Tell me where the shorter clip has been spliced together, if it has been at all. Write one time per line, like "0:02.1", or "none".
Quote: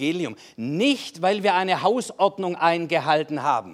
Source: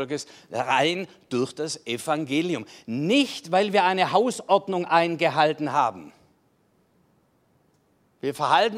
none